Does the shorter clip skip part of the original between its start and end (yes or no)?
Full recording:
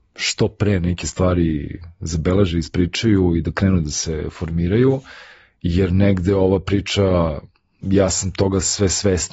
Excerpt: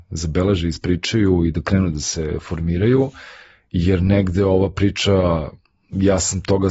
no